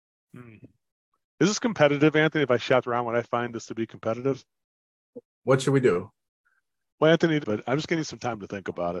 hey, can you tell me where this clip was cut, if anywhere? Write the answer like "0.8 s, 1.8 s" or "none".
5.2 s, 7.4 s